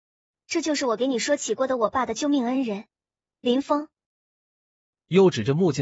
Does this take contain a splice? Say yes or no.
no